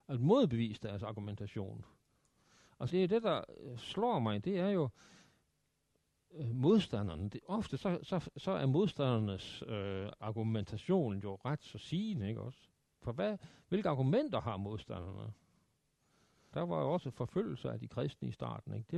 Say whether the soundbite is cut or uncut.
cut